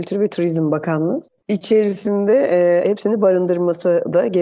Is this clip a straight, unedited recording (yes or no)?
no